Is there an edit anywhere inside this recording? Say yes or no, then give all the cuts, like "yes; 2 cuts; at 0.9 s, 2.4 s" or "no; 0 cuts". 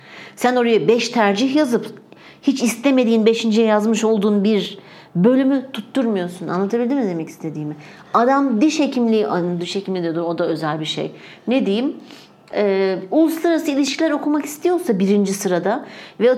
no; 0 cuts